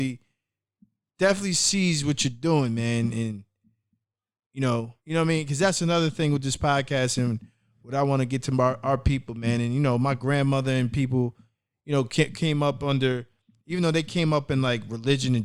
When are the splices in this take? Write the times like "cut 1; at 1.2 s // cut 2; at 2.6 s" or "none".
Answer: cut 1; at 5.0 s